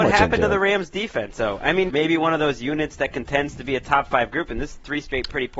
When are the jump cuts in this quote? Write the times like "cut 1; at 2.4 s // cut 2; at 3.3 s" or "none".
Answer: cut 1; at 1.9 s